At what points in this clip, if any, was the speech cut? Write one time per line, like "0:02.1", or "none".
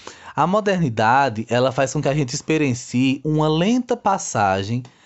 0:03.2